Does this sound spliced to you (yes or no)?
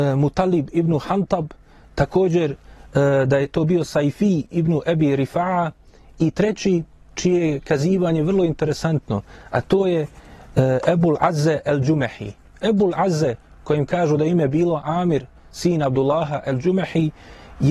no